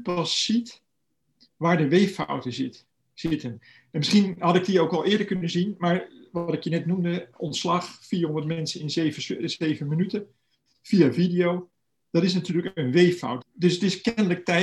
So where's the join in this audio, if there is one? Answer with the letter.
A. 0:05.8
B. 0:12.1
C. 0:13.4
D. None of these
C